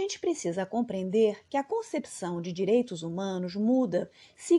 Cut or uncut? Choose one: uncut